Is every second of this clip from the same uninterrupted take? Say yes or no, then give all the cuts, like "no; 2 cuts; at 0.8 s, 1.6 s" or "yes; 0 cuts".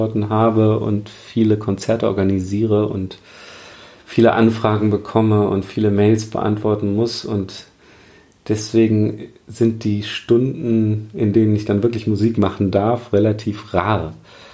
yes; 0 cuts